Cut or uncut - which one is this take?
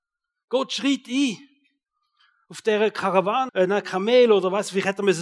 cut